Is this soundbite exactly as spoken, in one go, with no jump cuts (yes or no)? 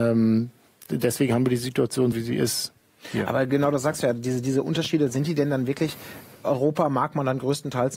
no